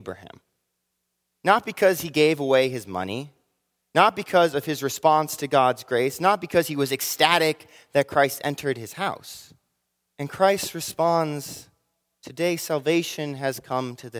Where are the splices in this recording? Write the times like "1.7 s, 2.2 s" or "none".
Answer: 1.3 s, 10.0 s